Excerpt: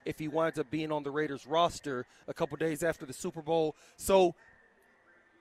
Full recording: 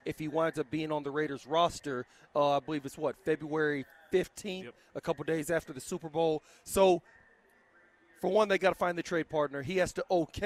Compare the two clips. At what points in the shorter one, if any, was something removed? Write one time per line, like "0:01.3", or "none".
0:02.2